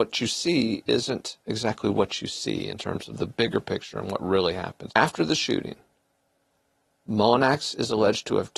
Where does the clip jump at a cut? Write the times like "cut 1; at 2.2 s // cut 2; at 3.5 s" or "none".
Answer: cut 1; at 1.4 s // cut 2; at 4.9 s